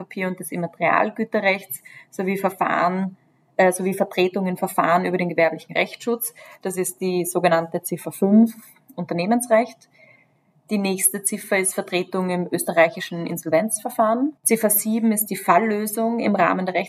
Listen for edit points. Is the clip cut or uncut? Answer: uncut